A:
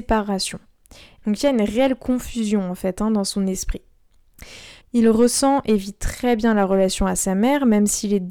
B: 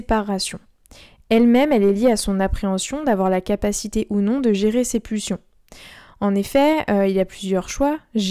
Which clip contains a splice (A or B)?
A